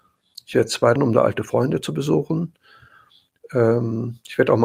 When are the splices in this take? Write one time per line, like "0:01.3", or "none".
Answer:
0:01.0

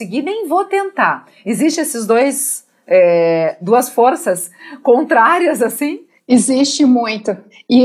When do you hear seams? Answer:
none

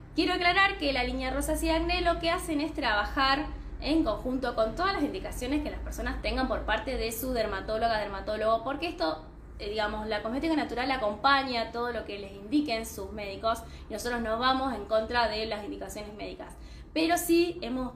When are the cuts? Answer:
none

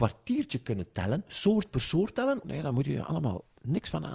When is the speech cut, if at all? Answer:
0:01.3
0:02.4

